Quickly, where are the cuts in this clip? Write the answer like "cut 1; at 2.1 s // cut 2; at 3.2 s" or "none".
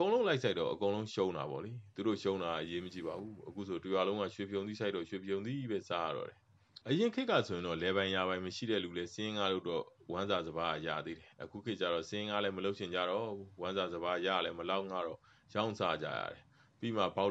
cut 1; at 6.8 s